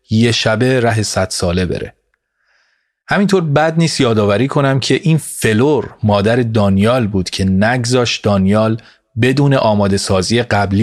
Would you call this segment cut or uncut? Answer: uncut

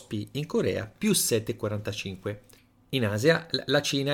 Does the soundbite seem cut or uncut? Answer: uncut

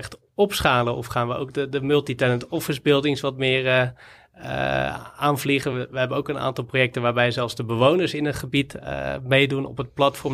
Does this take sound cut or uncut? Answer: uncut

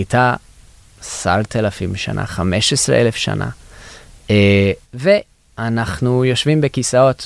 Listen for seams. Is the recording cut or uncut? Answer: cut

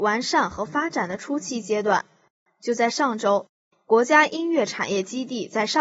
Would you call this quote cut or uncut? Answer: uncut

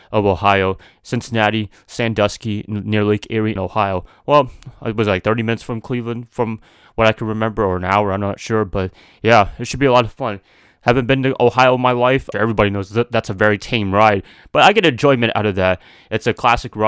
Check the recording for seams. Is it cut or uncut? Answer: cut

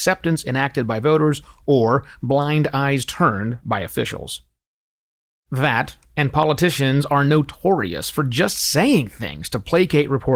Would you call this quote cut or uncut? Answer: uncut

